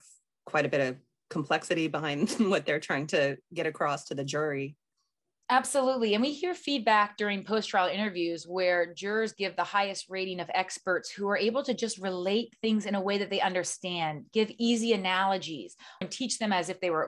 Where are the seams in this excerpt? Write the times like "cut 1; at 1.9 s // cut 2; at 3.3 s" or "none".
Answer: cut 1; at 16.0 s